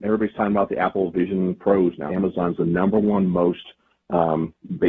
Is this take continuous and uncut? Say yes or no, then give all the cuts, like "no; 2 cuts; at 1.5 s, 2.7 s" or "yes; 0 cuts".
no; 1 cut; at 2.1 s